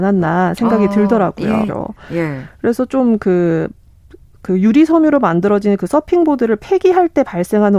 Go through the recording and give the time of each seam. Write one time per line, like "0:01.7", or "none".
0:01.7